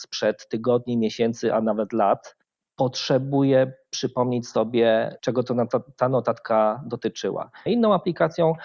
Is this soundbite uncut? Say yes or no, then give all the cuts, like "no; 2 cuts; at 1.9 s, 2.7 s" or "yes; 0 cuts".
no; 2 cuts; at 5.2 s, 7.7 s